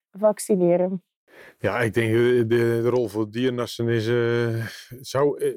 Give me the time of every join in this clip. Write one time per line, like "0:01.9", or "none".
none